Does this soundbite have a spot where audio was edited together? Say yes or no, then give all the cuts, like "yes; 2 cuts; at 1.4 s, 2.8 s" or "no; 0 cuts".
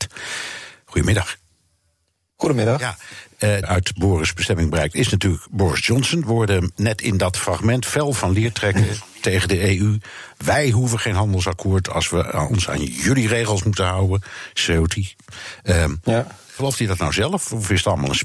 yes; 1 cut; at 3.6 s